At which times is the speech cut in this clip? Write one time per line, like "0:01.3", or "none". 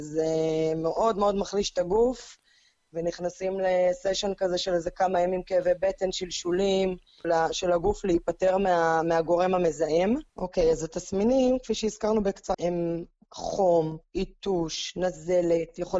0:07.2
0:10.3
0:12.5